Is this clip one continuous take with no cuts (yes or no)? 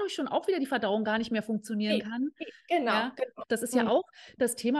no